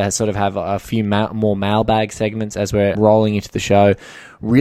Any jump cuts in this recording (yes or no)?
yes